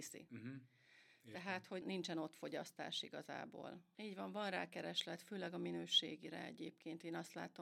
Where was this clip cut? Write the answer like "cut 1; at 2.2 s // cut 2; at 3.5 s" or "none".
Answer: cut 1; at 1.8 s // cut 2; at 3.9 s

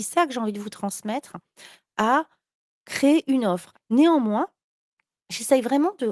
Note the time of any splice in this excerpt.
cut 1; at 3.7 s

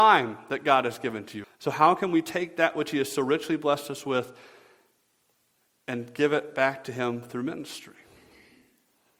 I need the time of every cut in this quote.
cut 1; at 1.4 s

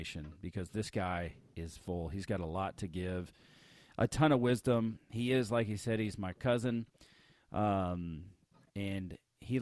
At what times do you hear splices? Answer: none

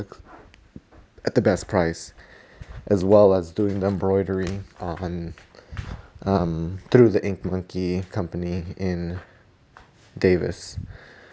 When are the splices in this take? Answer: cut 1; at 4.7 s

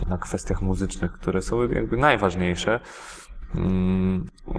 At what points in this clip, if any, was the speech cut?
none

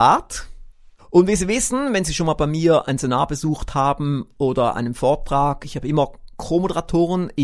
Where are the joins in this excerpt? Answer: cut 1; at 1.0 s

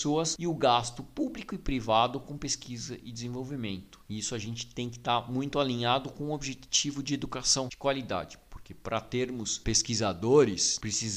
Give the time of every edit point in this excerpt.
none

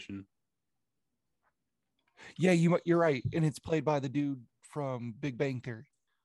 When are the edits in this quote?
none

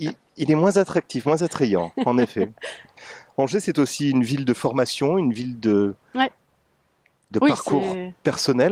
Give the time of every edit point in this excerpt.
none

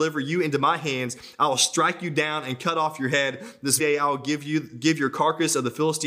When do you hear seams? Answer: cut 1; at 3.8 s

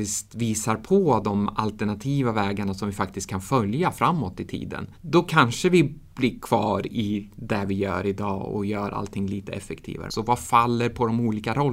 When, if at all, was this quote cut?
cut 1; at 5.0 s // cut 2; at 10.1 s

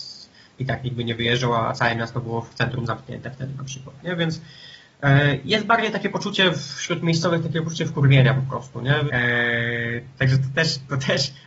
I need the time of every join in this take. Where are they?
cut 1; at 9.1 s

